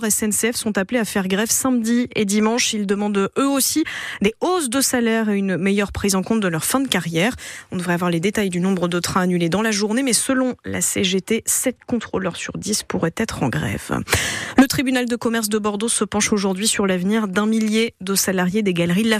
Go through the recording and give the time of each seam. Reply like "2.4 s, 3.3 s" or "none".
none